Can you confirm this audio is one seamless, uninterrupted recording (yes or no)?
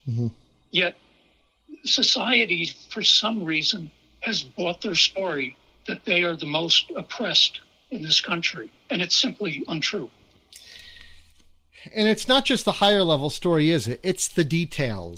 yes